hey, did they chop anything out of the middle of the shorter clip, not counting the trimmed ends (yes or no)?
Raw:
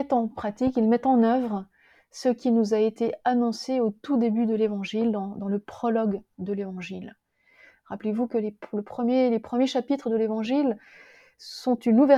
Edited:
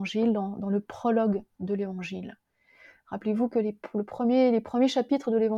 no